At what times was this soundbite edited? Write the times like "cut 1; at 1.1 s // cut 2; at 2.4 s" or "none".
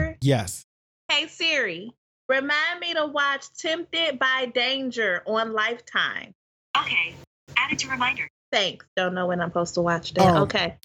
cut 1; at 8.9 s